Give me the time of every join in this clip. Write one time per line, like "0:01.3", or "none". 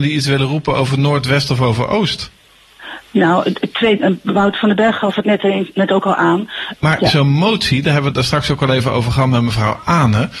0:06.7